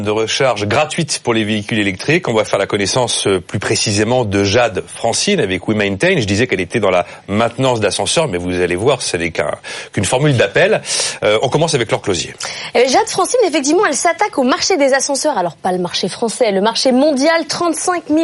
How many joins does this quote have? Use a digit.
0